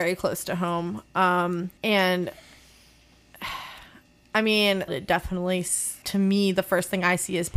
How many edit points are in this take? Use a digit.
3